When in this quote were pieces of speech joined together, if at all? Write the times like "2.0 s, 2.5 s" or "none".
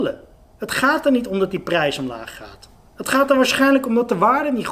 none